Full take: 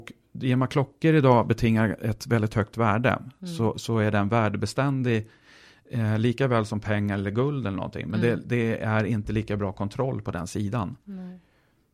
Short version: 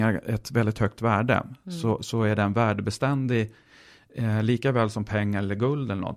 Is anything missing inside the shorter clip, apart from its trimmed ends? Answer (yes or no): no